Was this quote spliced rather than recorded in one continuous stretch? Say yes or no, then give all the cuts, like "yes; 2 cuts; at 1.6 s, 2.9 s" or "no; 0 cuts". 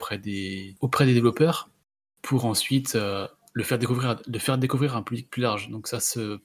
no; 0 cuts